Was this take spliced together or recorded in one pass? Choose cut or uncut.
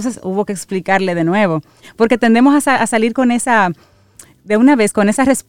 uncut